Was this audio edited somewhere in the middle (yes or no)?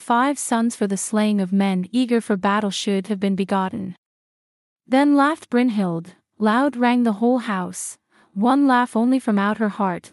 no